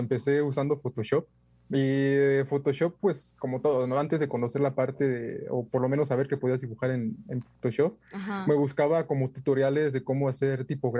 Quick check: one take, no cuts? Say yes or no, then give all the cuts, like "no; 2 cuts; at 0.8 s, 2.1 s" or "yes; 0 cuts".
yes; 0 cuts